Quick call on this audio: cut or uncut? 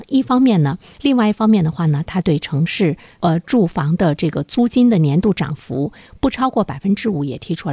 cut